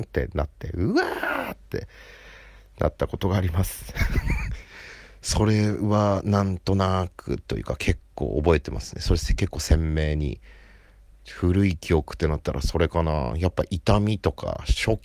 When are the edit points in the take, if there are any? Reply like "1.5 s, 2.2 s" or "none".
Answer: none